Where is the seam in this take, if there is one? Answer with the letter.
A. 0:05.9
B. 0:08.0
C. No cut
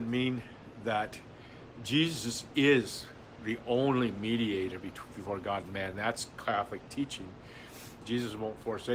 B